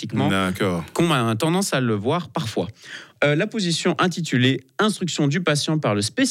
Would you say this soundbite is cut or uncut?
cut